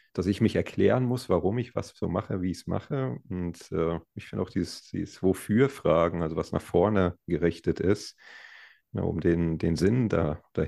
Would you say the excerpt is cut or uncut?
uncut